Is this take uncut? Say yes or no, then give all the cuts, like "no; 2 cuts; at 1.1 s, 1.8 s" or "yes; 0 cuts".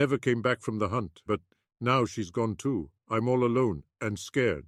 no; 1 cut; at 1.3 s